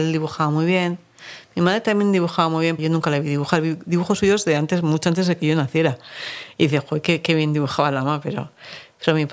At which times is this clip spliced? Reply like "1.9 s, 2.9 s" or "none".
2.8 s